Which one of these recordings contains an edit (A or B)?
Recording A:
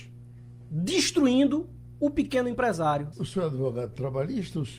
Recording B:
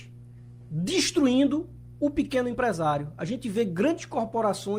A